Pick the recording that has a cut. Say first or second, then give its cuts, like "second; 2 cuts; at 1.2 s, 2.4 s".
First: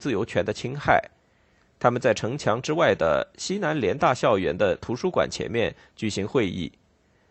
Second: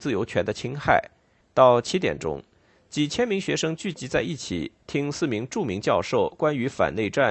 second; 1 cut; at 1.4 s